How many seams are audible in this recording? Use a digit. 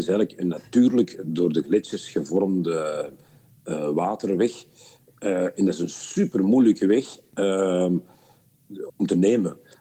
1